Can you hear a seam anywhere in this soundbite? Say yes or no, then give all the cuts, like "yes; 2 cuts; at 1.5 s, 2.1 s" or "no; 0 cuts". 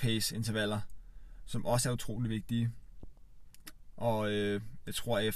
yes; 1 cut; at 3.9 s